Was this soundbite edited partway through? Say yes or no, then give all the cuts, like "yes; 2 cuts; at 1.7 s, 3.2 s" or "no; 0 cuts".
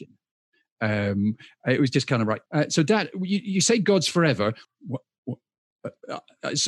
yes; 2 cuts; at 2.5 s, 4.6 s